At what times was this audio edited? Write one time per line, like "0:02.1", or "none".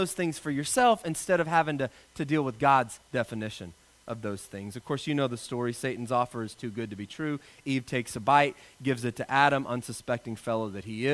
none